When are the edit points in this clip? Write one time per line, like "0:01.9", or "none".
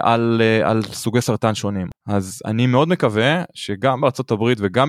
none